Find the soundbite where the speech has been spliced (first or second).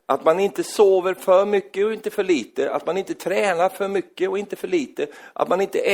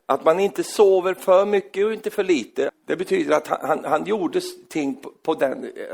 second